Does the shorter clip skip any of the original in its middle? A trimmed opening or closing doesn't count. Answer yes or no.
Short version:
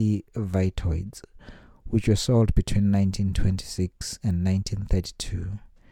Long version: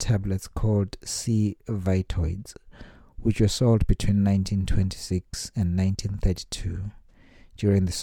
no